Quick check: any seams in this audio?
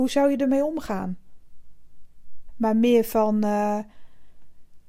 yes; 1 cut; at 2.5 s

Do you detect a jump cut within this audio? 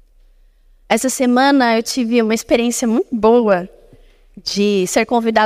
no; 0 cuts

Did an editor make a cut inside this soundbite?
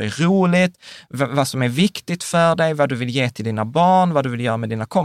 no; 0 cuts

